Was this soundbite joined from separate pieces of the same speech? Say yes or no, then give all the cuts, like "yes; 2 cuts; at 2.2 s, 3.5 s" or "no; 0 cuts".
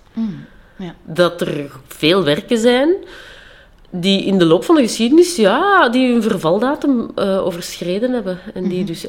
no; 0 cuts